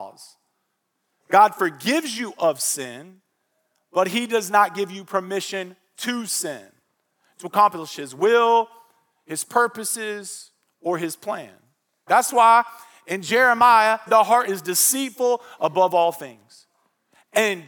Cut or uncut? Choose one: cut